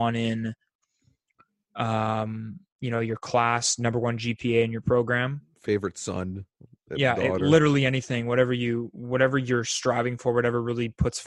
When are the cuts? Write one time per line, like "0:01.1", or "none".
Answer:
none